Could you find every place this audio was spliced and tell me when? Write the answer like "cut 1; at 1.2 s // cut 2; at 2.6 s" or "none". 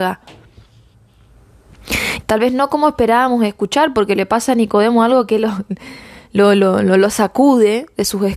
cut 1; at 2.2 s

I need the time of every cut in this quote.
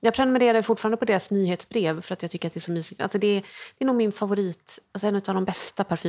none

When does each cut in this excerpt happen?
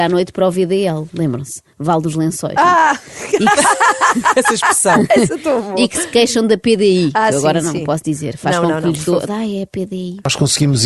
cut 1; at 9.3 s

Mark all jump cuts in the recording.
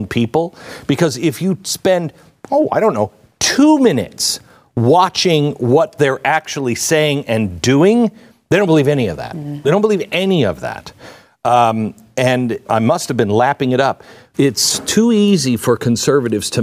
cut 1; at 12.6 s // cut 2; at 14.3 s

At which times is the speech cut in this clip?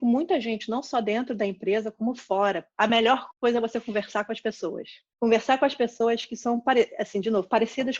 cut 1; at 2.7 s

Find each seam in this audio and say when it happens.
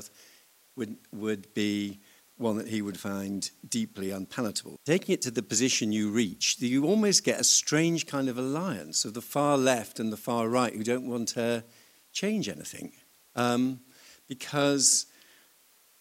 cut 1; at 4.8 s

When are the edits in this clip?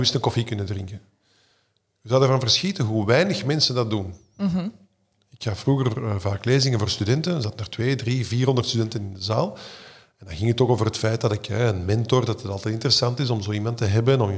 none

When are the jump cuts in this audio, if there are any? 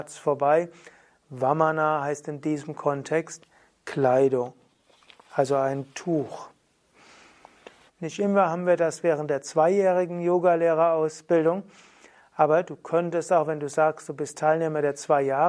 cut 1; at 7.9 s

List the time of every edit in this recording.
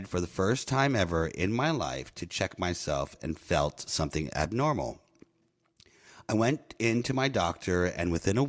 none

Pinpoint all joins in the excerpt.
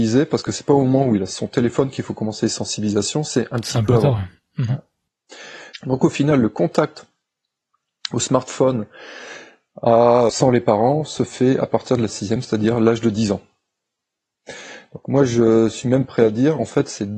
cut 1; at 5.7 s // cut 2; at 10.3 s

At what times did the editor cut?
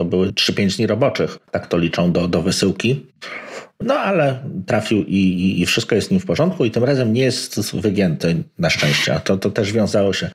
cut 1; at 1.4 s

